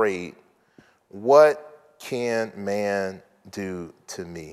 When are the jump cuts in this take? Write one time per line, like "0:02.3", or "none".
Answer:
none